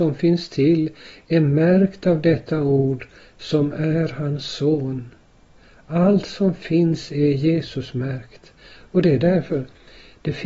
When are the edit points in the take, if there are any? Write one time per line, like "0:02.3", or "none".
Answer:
none